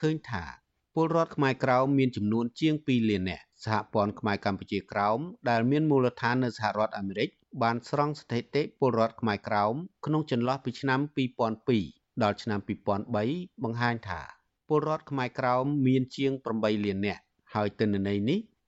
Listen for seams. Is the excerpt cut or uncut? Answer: cut